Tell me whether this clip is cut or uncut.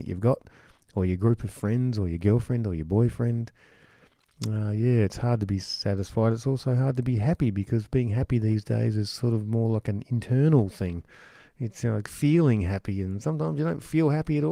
uncut